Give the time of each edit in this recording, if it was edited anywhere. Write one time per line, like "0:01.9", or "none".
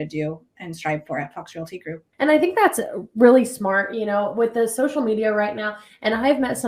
0:02.1

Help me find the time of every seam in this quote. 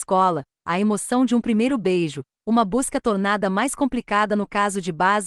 0:02.4

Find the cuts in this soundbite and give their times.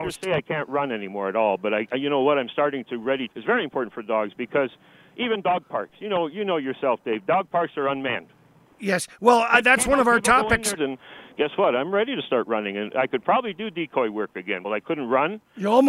0:03.3
0:10.8
0:14.6

